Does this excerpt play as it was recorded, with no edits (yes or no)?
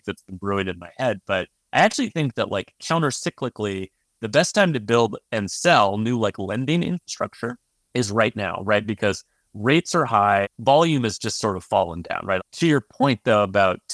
no